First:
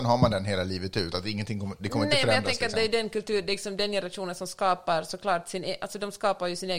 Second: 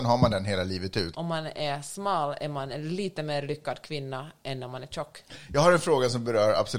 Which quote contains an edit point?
second; 1 cut; at 1.1 s

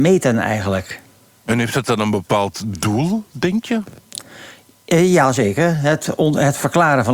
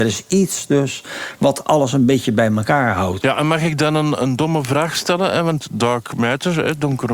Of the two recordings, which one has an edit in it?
second; 1 cut; at 3.2 s

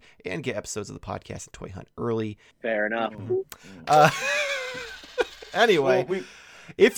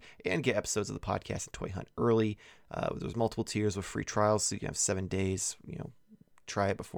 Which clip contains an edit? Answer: first; 1 cut; at 2.5 s

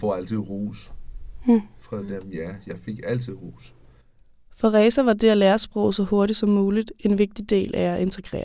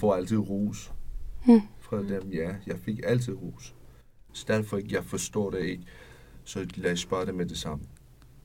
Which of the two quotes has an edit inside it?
second; 1 cut; at 4.3 s

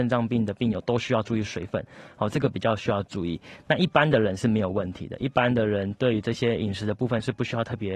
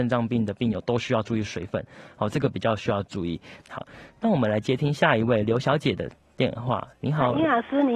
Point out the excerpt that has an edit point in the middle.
second; 1 cut; at 3.6 s

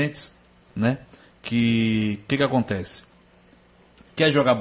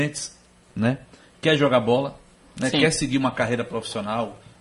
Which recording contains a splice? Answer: second; 1 cut; at 1.3 s

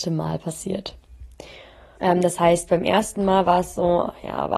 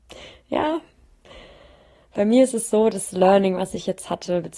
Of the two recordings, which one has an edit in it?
first; 1 cut; at 2.0 s

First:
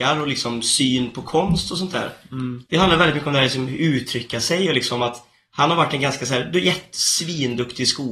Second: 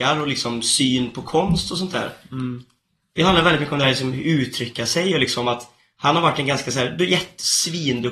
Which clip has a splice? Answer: first; 1 cut; at 2.7 s

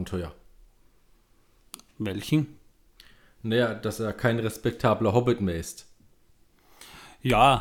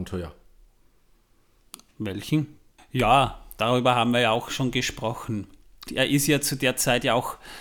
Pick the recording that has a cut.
second; 2 cuts; at 2.8 s, 5.9 s

